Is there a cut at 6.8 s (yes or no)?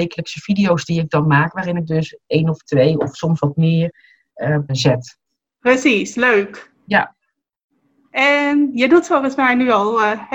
yes